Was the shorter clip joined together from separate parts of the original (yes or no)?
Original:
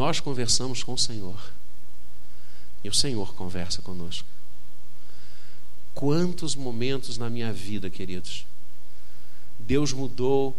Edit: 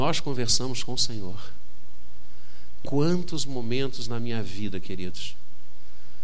yes